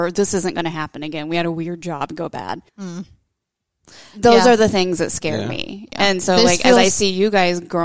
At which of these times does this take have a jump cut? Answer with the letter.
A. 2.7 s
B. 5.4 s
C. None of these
A